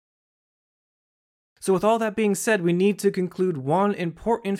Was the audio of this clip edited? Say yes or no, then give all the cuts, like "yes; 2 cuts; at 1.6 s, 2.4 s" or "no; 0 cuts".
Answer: no; 0 cuts